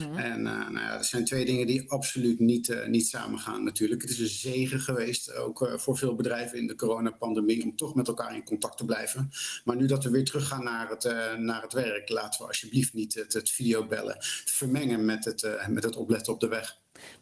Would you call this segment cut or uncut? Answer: uncut